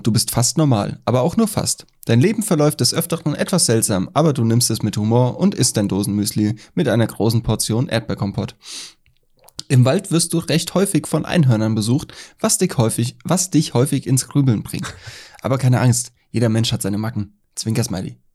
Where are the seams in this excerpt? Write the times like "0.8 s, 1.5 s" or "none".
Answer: none